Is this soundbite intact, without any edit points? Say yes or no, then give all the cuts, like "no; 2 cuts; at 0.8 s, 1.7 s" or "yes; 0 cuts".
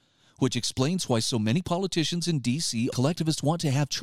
no; 1 cut; at 2.9 s